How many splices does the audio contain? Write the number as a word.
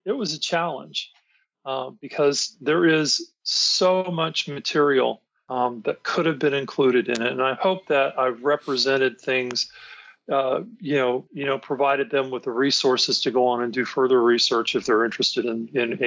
one